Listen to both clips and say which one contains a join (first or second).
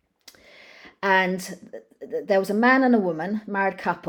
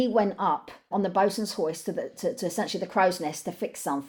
second